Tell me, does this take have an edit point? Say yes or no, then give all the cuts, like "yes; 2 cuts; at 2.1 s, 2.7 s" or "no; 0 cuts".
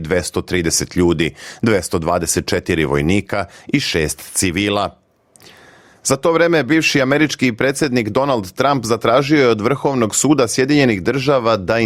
no; 0 cuts